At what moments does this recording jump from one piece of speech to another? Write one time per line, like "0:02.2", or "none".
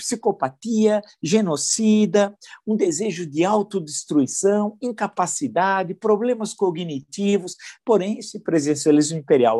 0:07.8